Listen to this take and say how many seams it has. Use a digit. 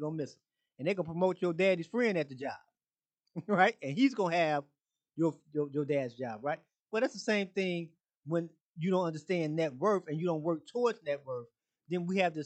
0